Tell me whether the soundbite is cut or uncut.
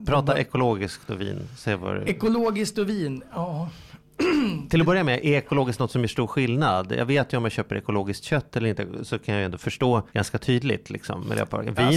cut